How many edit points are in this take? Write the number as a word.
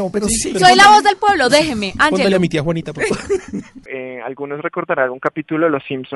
one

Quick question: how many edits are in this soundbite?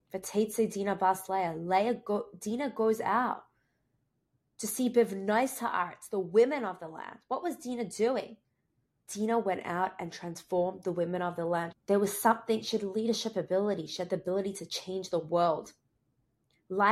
two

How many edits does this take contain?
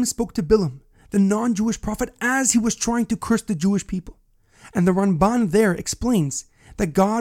one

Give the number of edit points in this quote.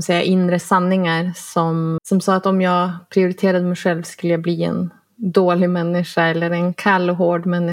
one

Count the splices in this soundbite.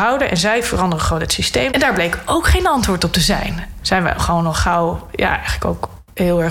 two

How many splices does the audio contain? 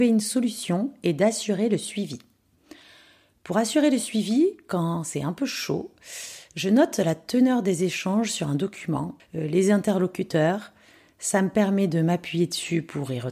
one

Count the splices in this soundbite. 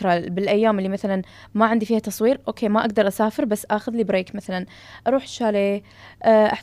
zero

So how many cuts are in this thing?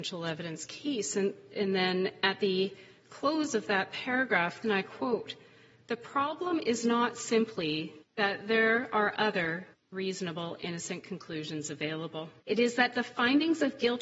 two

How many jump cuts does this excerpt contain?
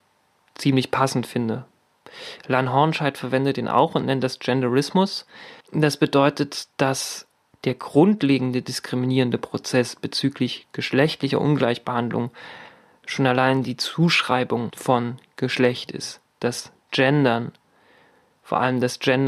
one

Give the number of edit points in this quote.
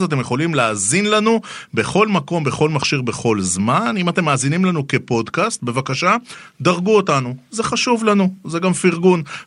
zero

